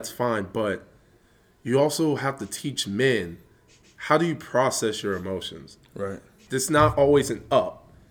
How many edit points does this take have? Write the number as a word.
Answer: two